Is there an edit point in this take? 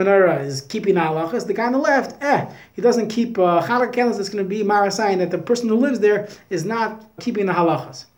yes; 1 cut; at 7.2 s

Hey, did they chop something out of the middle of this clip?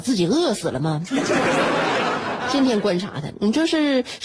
no; 0 cuts

